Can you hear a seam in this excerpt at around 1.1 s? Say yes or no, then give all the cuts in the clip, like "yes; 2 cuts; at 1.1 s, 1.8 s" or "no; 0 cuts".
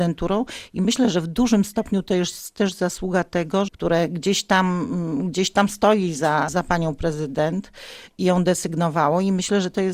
no; 2 cuts; at 3.7 s, 6.5 s